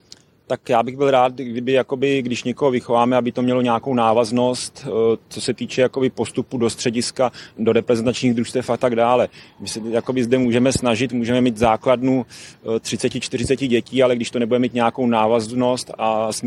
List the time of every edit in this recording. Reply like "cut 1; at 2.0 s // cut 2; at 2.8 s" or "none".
cut 1; at 7.5 s